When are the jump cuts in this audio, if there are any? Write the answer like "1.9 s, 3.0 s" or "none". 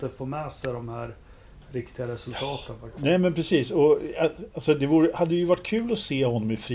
3.0 s

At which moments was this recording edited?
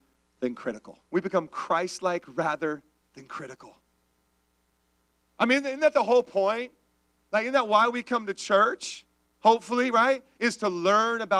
1.1 s

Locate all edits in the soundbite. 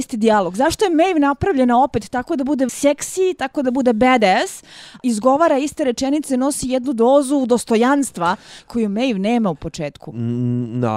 2.7 s, 5.0 s

